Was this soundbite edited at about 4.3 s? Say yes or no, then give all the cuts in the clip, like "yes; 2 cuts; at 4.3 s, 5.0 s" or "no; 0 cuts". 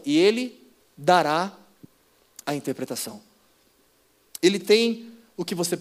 yes; 1 cut; at 4.3 s